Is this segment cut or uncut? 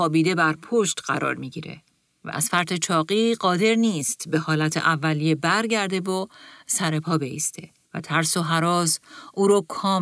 cut